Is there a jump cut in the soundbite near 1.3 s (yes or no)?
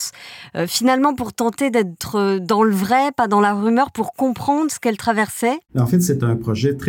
no